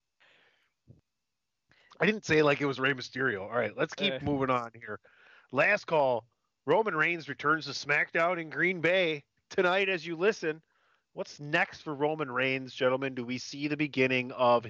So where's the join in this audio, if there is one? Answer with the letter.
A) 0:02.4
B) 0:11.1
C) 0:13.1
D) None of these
D